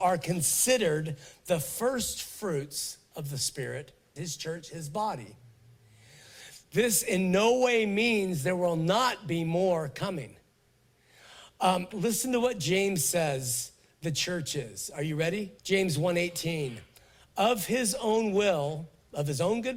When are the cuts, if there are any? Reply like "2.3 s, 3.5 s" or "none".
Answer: 4.2 s, 11.9 s, 15.6 s